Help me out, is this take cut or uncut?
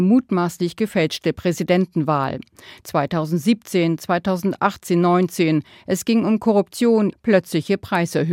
cut